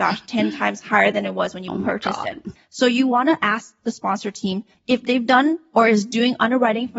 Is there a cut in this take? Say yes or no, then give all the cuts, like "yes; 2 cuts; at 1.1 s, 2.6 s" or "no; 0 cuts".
yes; 2 cuts; at 2.6 s, 4.8 s